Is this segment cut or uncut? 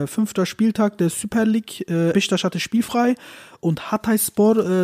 cut